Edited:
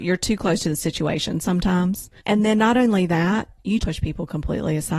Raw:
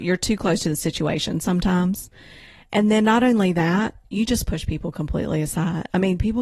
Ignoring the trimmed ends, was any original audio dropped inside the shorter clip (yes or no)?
yes